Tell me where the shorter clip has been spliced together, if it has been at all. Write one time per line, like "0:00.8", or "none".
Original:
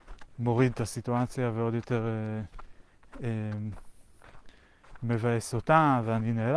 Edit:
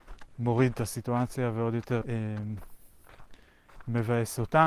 0:02.0